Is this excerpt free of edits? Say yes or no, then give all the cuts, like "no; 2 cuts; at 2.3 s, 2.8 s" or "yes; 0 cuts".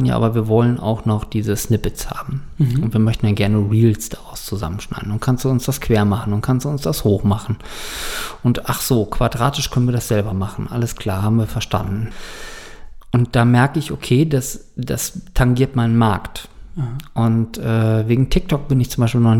yes; 0 cuts